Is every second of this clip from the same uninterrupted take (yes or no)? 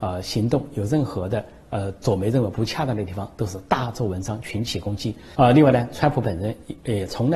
no